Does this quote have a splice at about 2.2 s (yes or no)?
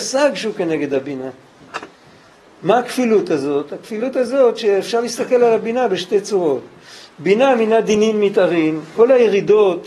no